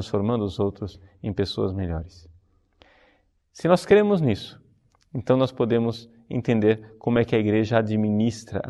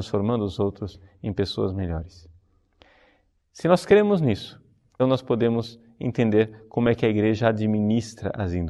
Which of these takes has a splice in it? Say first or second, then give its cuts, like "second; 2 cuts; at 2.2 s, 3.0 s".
second; 1 cut; at 5.0 s